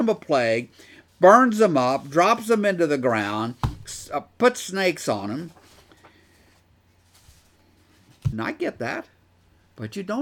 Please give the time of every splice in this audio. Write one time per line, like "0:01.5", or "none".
0:01.1
0:08.3

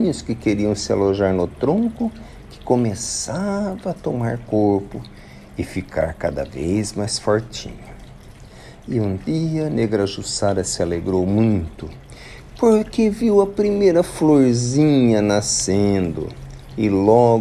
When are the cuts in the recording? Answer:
none

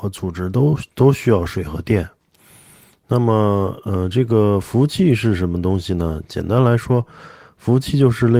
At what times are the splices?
none

